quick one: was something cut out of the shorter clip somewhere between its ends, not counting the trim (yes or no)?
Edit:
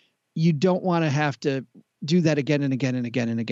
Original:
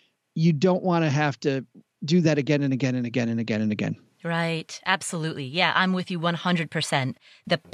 no